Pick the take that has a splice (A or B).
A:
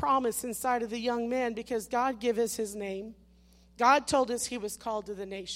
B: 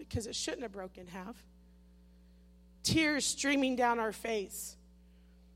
B